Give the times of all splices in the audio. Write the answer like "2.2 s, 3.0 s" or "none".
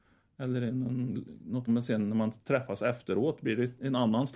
1.7 s